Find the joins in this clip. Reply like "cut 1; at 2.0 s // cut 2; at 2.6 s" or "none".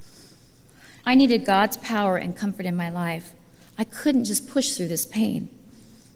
cut 1; at 1.0 s